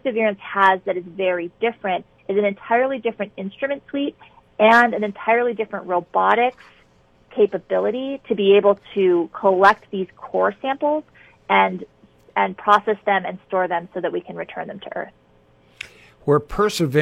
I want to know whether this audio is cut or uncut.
uncut